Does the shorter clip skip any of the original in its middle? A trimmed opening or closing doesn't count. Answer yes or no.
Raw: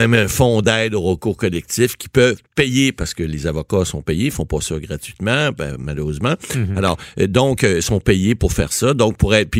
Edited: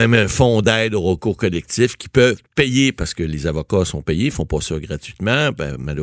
no